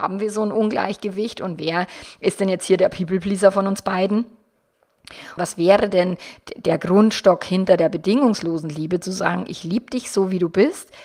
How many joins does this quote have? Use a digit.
1